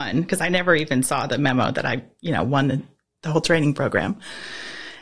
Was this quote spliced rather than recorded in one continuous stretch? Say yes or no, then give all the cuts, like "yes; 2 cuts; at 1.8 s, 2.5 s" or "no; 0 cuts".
no; 0 cuts